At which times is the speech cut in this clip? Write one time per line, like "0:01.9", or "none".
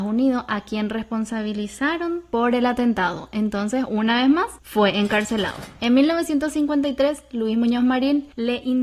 none